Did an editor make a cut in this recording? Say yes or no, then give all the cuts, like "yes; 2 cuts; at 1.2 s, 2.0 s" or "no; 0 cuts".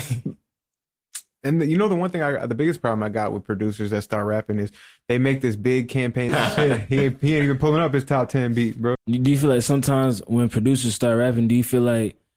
yes; 2 cuts; at 6.3 s, 8.9 s